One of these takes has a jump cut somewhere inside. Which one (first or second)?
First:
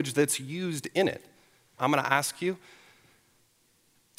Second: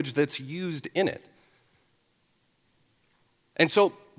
first